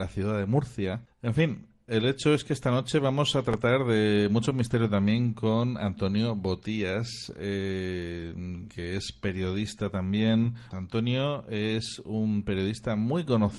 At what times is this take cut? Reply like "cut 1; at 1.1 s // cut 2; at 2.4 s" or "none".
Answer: cut 1; at 1.1 s // cut 2; at 10.7 s